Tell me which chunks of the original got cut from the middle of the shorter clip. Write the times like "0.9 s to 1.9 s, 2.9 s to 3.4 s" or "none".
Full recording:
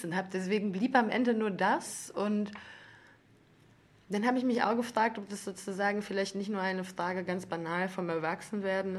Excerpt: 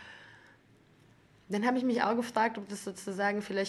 none